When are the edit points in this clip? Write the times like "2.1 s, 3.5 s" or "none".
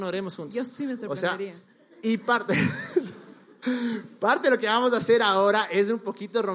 none

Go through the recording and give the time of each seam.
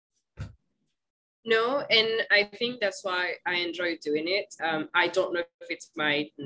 4.6 s

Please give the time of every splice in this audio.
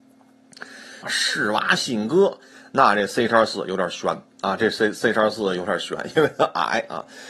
1.0 s, 4.3 s

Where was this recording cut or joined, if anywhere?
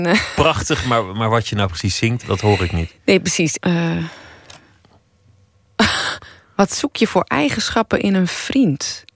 2.2 s, 3.6 s

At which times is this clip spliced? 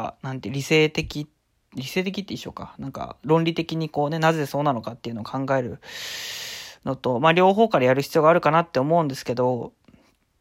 none

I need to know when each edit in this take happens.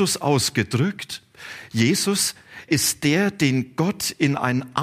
2.7 s

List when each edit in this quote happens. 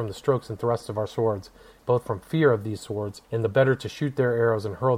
1.8 s, 3.2 s

